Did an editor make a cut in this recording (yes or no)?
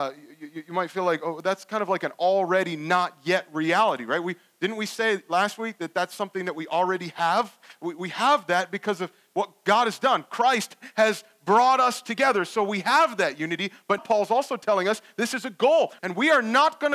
yes